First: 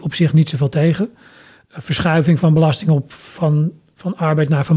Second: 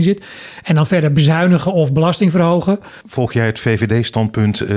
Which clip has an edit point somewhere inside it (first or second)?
second